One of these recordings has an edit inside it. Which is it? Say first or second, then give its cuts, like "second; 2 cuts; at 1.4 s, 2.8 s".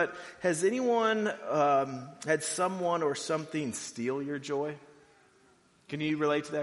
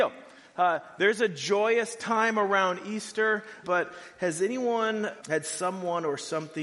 second; 2 cuts; at 3.6 s, 5.2 s